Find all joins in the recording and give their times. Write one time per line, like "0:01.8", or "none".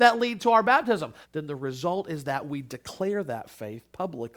0:01.2